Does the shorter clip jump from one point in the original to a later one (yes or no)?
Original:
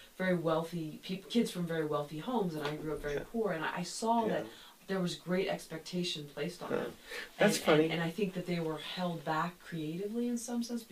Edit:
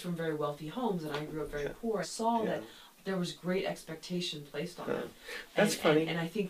yes